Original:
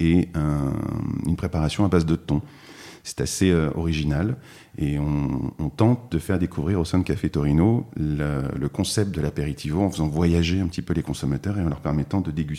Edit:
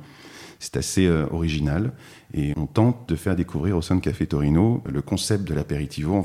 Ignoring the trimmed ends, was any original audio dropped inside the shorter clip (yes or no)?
yes